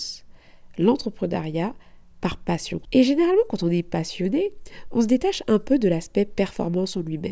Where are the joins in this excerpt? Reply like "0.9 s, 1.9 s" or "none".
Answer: 2.8 s